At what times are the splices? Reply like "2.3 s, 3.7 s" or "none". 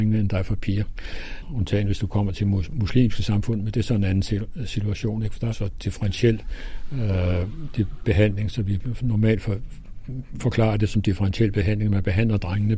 5.5 s